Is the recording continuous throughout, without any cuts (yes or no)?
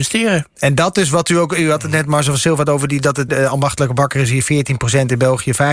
no